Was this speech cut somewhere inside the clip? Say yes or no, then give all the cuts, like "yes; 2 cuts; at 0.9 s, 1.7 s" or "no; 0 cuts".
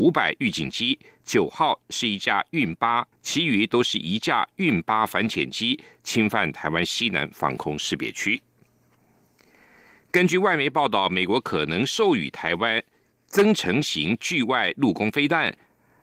yes; 1 cut; at 3.1 s